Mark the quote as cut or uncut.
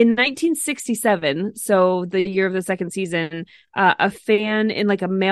uncut